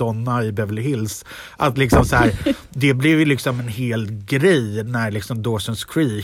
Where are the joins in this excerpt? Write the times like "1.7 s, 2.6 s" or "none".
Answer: none